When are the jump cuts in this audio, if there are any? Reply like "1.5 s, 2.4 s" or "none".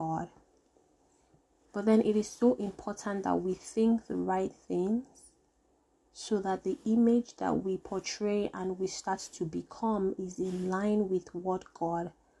1.7 s